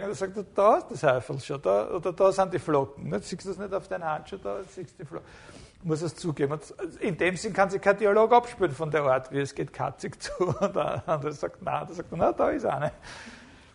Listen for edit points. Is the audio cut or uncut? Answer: uncut